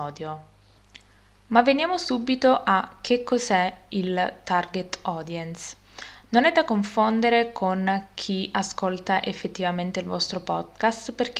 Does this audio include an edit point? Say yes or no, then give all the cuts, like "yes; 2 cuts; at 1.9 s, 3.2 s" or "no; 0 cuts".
no; 0 cuts